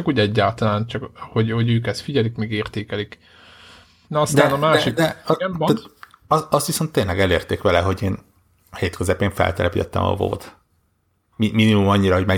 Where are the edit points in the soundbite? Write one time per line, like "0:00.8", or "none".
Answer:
0:04.0